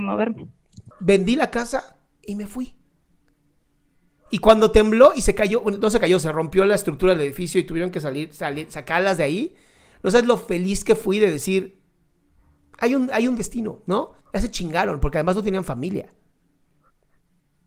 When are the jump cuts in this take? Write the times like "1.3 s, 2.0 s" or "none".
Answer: 0.9 s, 14.2 s